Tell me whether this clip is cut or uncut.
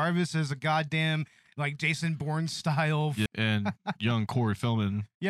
cut